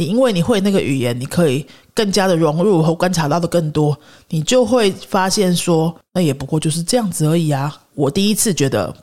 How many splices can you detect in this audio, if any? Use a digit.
0